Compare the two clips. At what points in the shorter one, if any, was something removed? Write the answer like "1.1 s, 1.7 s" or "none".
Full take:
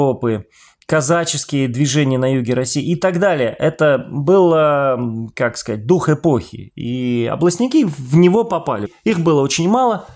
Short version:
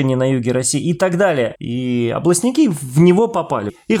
1.5 s